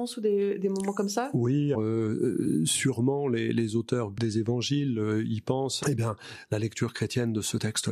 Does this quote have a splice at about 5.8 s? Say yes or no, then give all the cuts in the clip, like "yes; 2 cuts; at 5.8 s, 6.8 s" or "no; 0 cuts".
yes; 2 cuts; at 1.7 s, 5.8 s